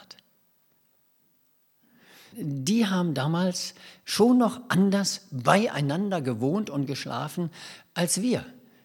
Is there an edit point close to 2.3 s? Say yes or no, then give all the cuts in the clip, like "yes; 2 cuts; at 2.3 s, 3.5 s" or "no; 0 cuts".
yes; 1 cut; at 2.3 s